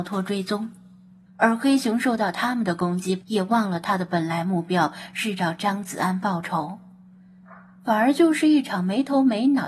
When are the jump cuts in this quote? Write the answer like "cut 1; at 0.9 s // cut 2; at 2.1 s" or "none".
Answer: cut 1; at 1.3 s // cut 2; at 3.2 s